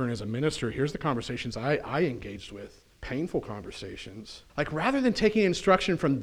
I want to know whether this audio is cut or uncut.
cut